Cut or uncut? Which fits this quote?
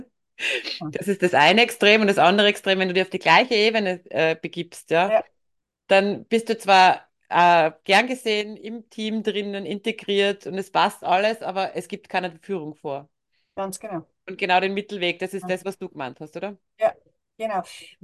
uncut